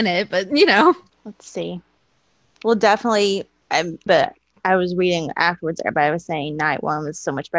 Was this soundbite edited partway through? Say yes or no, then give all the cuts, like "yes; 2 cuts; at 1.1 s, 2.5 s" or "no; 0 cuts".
yes; 2 cuts; at 1.1 s, 4.1 s